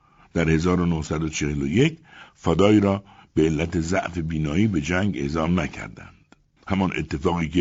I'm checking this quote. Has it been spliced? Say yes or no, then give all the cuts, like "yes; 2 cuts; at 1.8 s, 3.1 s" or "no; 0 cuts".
yes; 1 cut; at 6.6 s